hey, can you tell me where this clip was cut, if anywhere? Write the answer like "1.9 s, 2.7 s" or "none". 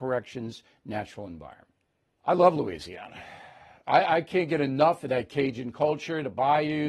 2.2 s